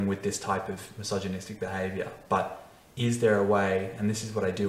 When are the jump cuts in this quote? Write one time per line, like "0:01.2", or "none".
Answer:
none